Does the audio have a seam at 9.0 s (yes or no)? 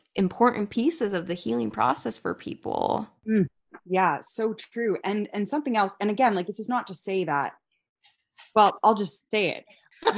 no